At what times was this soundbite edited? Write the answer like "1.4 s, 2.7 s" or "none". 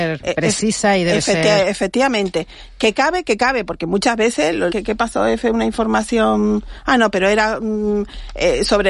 4.7 s